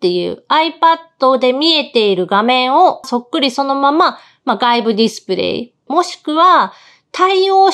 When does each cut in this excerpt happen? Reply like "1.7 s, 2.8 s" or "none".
3.0 s, 5.9 s